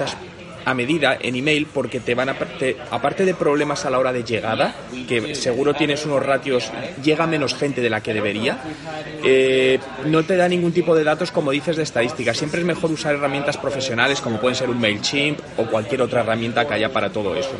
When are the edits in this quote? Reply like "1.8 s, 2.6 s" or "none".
2.9 s